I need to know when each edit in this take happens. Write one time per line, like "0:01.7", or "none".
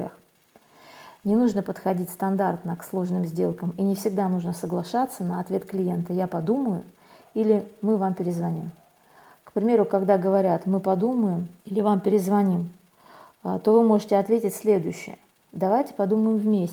0:11.6